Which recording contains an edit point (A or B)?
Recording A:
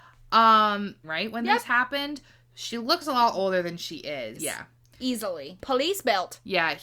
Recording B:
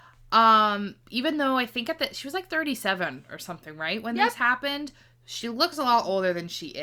A